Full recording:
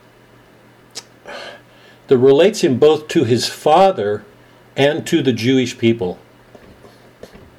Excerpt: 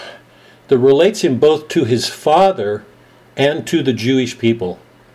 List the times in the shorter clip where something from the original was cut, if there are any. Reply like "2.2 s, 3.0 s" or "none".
none